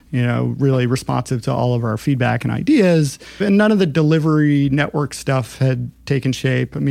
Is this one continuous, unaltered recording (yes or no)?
no